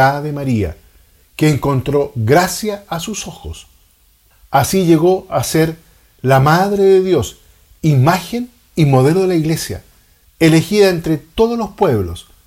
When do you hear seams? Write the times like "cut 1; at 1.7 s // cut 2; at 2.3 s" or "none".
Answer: none